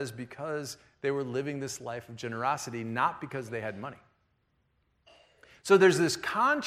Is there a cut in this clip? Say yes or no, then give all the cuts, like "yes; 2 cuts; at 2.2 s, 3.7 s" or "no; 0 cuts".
no; 0 cuts